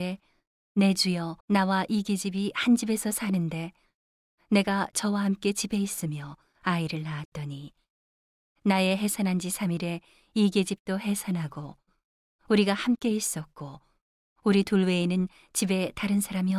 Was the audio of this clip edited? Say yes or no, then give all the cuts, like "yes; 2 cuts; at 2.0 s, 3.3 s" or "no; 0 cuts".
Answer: yes; 1 cut; at 1.4 s